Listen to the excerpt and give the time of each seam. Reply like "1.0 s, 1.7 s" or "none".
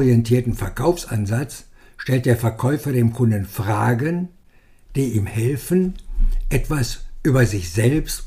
none

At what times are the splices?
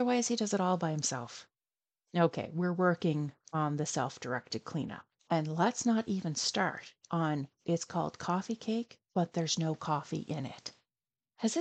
5.2 s, 9.1 s

